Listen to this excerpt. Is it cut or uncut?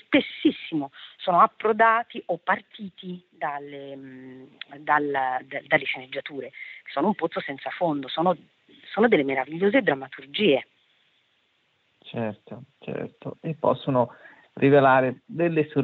uncut